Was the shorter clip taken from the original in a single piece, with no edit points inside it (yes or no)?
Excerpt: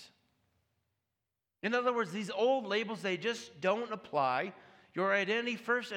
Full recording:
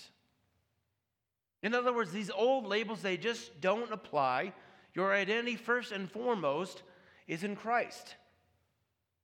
yes